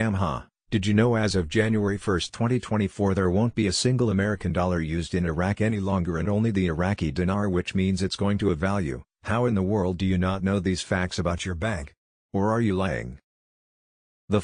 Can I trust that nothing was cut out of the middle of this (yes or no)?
yes